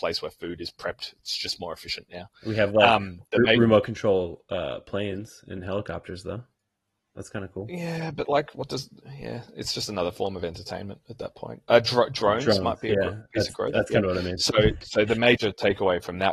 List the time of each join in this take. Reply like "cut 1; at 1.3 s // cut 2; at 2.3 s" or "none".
none